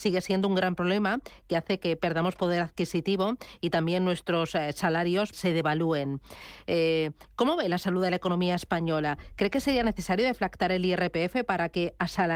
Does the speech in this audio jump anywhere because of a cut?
yes; 1 cut; at 5.3 s

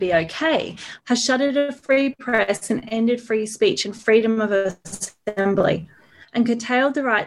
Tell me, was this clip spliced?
yes; 1 cut; at 1.0 s

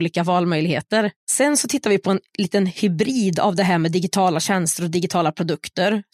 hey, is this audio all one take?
no; 1 cut; at 1.2 s

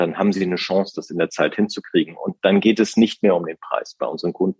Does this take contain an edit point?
no; 0 cuts

